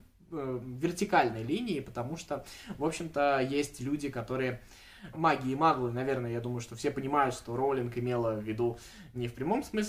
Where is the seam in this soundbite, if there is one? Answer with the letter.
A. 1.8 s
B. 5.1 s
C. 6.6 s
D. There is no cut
B